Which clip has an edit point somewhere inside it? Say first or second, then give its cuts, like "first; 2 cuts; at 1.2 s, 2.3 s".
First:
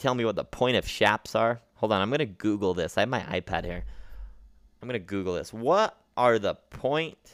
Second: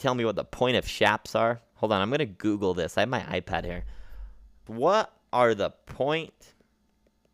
second; 1 cut; at 4.7 s